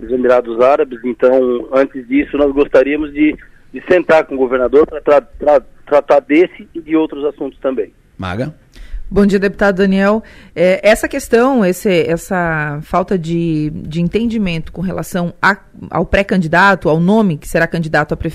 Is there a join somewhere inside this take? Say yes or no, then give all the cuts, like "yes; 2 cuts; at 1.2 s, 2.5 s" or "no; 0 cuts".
no; 0 cuts